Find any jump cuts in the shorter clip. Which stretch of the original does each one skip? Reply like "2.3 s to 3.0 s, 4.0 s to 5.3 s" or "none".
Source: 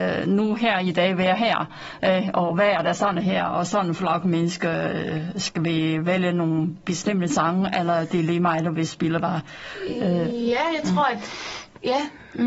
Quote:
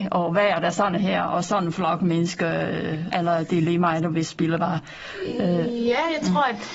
5.3 s to 7.7 s